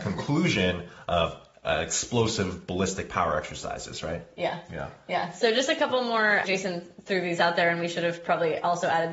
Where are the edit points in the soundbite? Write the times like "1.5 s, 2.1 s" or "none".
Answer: 6.4 s